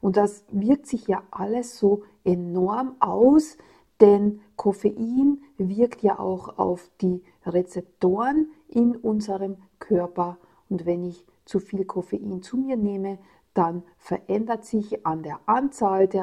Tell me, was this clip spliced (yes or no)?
no